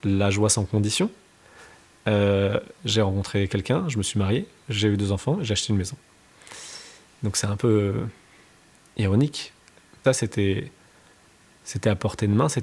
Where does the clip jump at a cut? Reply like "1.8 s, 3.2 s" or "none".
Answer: 10.0 s